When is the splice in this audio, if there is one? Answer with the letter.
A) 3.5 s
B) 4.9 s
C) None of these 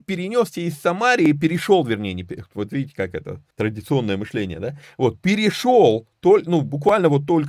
A